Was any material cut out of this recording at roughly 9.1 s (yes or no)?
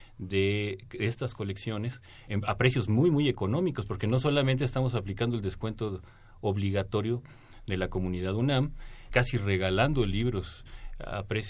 yes